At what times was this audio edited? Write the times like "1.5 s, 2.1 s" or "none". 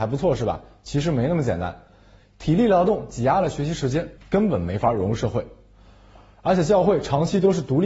2.2 s, 4.2 s